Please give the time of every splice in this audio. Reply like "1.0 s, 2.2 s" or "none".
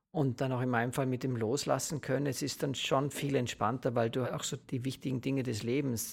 4.2 s

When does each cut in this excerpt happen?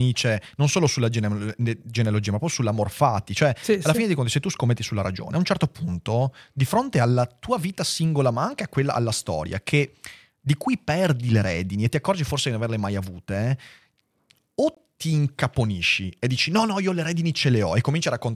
none

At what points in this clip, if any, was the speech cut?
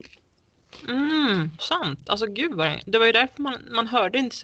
1.6 s

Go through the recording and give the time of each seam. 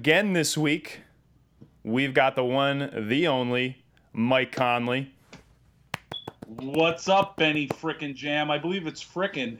none

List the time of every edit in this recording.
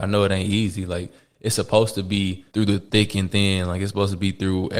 2.5 s

